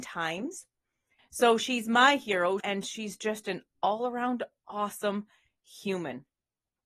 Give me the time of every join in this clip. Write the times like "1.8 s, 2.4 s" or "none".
1.2 s, 2.6 s